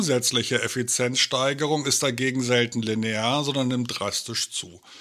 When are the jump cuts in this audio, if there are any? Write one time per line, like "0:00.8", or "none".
none